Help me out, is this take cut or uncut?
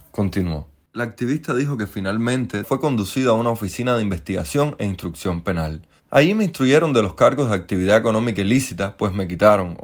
cut